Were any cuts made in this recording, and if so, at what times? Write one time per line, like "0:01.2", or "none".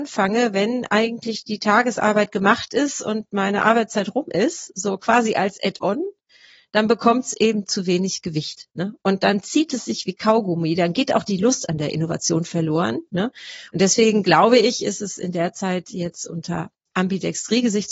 0:13.7